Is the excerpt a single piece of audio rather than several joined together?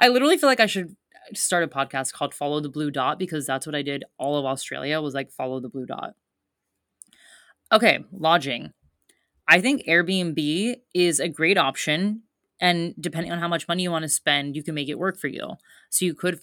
yes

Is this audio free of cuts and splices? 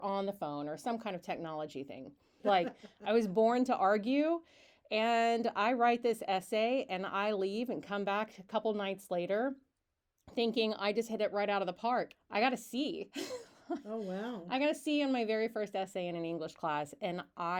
no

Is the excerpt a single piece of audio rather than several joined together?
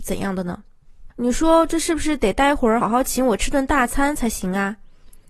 no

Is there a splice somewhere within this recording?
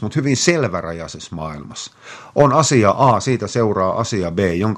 no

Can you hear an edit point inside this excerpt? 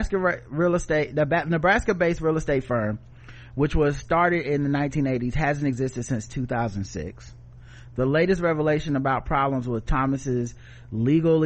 no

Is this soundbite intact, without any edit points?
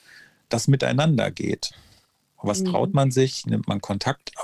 yes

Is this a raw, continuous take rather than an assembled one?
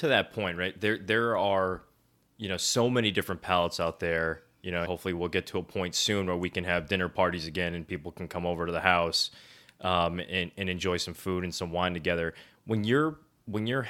no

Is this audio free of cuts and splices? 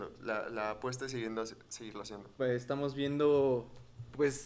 no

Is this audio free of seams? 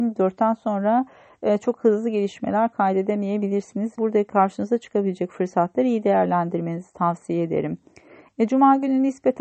no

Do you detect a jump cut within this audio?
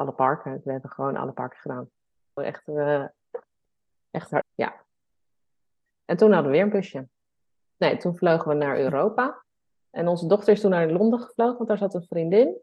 yes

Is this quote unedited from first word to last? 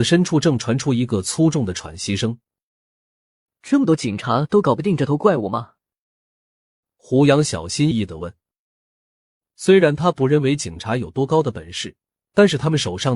no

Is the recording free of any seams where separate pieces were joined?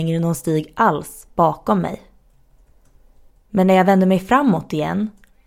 no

